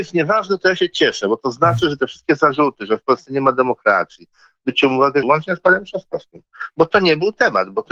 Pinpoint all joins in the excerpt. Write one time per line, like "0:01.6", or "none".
0:05.2